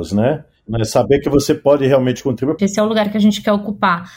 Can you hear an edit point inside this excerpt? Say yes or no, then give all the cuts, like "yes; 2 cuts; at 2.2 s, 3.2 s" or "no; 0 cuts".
yes; 1 cut; at 2.6 s